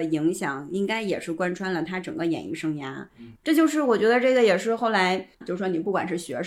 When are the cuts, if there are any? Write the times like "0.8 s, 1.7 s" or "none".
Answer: 3.3 s, 5.4 s